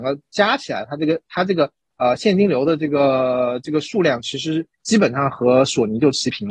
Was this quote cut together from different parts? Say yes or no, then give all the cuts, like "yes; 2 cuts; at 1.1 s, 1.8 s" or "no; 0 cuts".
no; 0 cuts